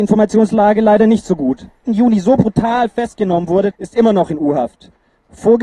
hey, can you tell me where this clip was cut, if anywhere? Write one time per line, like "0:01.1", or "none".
0:01.8
0:03.7